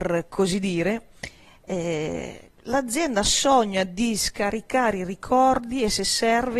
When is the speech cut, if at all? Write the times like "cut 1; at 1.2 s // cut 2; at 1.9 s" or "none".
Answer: cut 1; at 2.6 s